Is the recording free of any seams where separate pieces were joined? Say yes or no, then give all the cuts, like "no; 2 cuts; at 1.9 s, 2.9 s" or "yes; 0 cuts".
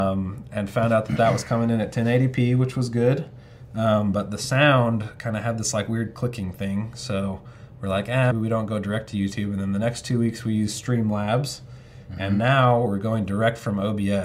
no; 1 cut; at 8.3 s